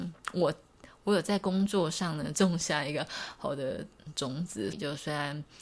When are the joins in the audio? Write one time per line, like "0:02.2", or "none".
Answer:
0:02.3
0:04.7

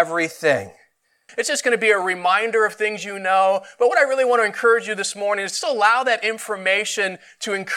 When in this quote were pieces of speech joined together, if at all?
0:01.3

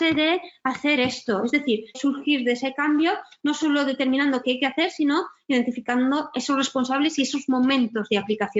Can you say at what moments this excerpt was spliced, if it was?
0:01.9

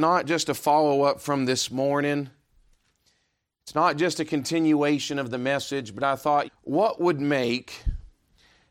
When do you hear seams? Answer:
0:06.4

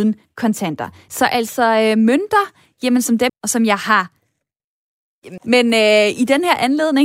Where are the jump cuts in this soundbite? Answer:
0:01.1
0:03.3
0:05.4

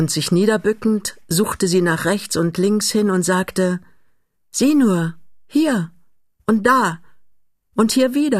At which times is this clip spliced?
none

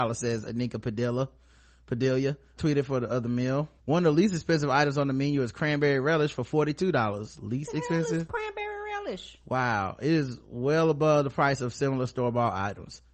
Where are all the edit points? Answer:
0:02.6
0:03.8

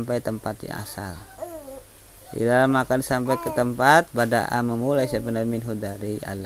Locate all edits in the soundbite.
none

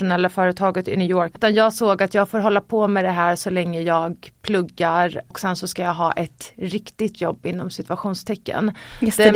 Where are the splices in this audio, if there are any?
0:01.3

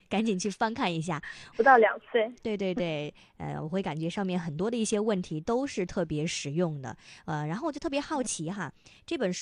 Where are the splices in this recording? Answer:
0:01.5

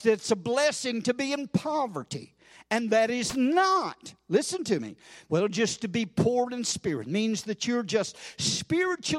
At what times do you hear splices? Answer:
0:05.3

